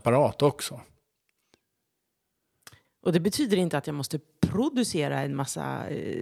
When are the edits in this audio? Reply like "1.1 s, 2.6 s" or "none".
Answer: 2.8 s